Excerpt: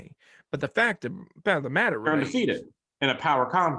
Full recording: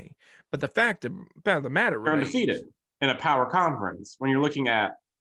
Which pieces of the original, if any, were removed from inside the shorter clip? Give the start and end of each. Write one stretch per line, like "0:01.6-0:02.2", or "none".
none